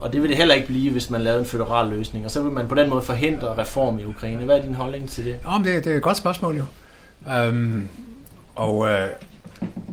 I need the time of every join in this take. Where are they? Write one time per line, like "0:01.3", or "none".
none